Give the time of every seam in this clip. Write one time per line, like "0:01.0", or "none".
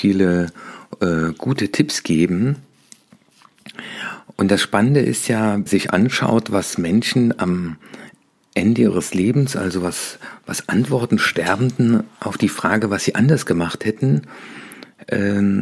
0:05.7